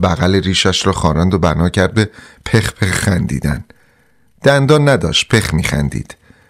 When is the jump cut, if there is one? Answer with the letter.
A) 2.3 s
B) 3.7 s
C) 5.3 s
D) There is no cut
C